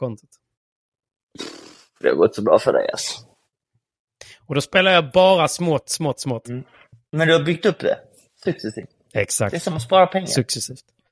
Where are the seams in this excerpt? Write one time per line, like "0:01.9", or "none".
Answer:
none